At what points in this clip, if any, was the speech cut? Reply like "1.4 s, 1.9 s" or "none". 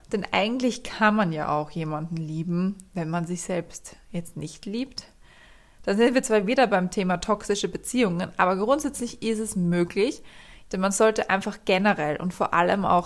10.7 s